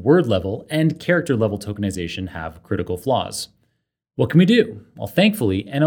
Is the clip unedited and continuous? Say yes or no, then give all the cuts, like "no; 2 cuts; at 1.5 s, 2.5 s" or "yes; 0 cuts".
yes; 0 cuts